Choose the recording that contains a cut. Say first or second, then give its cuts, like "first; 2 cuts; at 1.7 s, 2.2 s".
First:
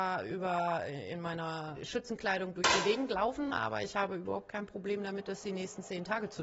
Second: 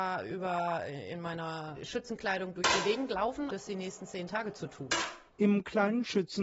second; 2 cuts; at 3.5 s, 5.3 s